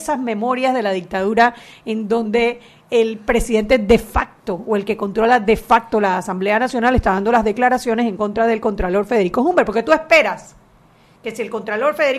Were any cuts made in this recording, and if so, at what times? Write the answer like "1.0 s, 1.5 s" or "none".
none